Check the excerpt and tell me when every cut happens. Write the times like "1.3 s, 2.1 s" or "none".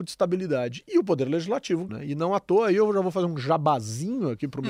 1.9 s